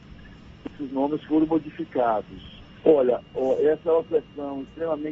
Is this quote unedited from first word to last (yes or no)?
no